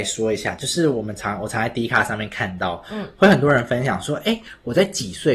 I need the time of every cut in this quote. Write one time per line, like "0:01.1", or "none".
none